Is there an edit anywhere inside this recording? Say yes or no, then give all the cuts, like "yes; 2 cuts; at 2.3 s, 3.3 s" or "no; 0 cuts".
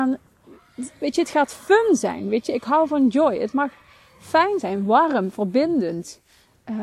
no; 0 cuts